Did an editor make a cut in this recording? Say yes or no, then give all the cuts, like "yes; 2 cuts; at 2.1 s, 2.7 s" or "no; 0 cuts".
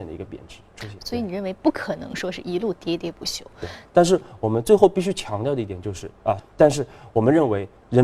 yes; 3 cuts; at 1.0 s, 3.9 s, 6.4 s